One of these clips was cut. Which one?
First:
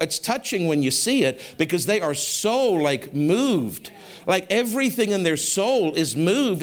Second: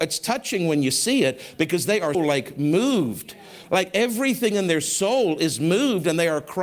second; 1 cut; at 2.1 s

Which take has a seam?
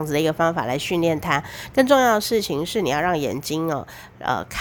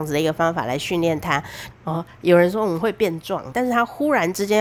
second; 2 cuts; at 1.7 s, 3.5 s

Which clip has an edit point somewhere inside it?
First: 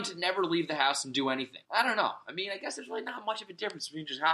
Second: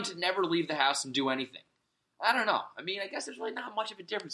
first; 1 cut; at 1.6 s

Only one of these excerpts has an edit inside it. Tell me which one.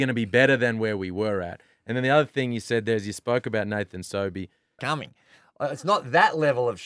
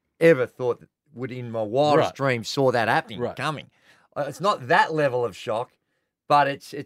first; 1 cut; at 4.8 s

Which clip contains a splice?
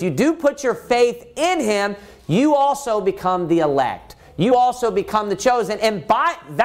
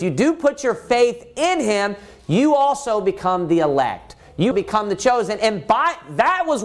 second; 1 cut; at 4.5 s

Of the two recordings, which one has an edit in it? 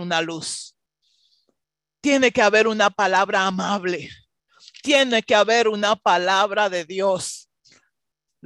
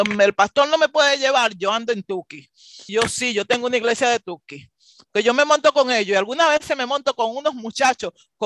second; 1 cut; at 2.9 s

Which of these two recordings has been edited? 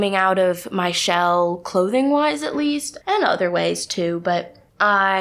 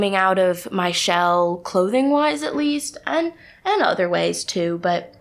first; 1 cut; at 3.0 s

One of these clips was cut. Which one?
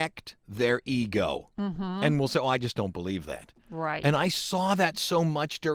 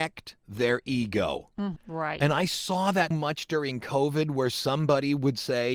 second; 2 cuts; at 1.8 s, 3.1 s

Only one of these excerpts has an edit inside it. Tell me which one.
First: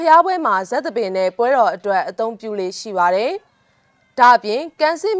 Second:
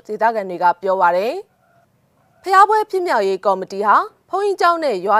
first; 1 cut; at 3.5 s

